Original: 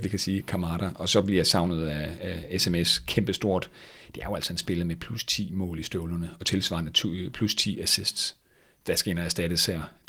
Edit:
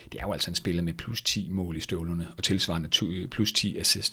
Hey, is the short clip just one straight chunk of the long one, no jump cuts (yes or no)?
yes